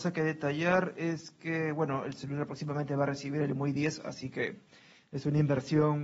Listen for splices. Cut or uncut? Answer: uncut